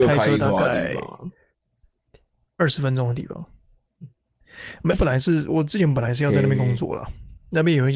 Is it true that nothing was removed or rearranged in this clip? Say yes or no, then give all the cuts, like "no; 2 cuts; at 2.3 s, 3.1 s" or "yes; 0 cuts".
no; 1 cut; at 4.9 s